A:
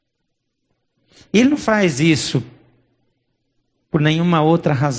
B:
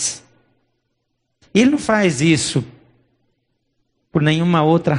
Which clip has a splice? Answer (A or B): B